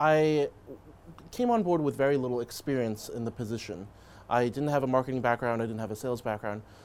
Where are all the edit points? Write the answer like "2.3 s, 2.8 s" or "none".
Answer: none